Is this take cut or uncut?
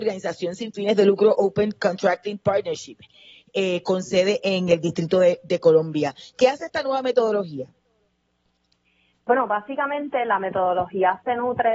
uncut